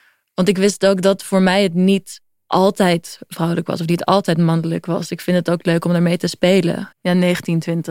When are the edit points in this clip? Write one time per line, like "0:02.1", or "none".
0:06.9